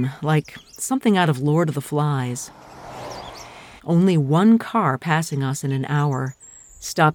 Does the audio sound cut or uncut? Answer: cut